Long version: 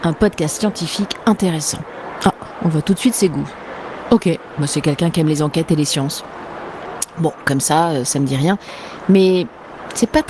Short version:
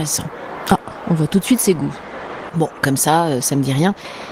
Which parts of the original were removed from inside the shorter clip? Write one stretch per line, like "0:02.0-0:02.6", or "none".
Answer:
0:04.0-0:07.1